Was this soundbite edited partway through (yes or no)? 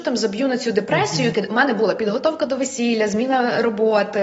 yes